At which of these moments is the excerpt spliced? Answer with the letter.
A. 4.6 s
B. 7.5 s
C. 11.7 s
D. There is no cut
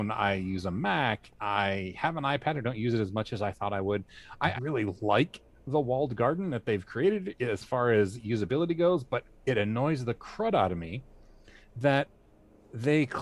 A